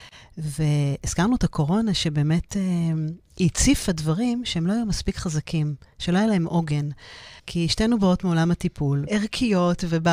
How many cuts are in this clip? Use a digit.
2